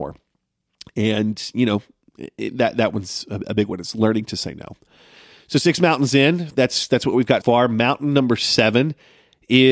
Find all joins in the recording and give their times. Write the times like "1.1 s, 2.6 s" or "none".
7.4 s

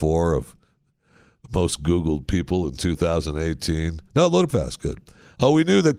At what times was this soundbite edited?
4.5 s

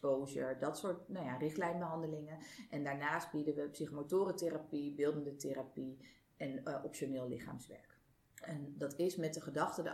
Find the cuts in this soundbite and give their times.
none

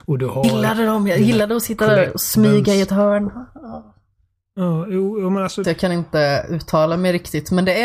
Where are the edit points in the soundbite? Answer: 5.6 s

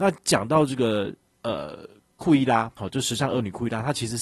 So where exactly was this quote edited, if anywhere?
none

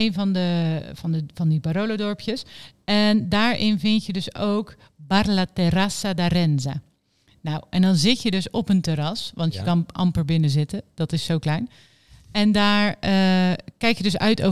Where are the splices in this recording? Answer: none

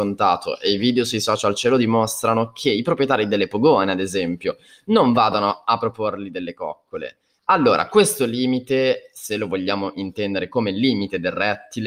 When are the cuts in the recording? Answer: 7.4 s

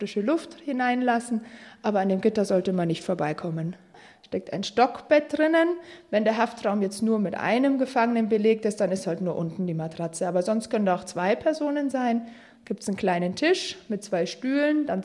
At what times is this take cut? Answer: none

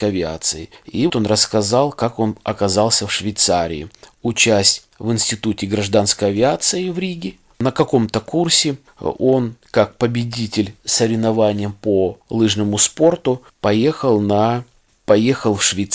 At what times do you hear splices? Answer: 1.1 s

